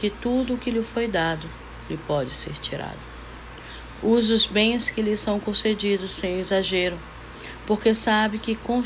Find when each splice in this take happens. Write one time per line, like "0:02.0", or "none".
none